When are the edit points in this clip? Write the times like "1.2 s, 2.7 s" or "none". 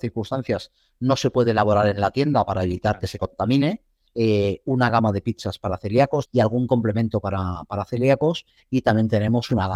4.1 s, 6.3 s